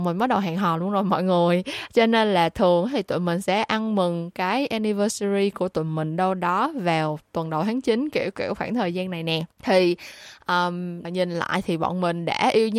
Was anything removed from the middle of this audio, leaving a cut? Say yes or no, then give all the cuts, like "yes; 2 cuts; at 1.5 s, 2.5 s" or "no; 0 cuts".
yes; 2 cuts; at 9.5 s, 11.0 s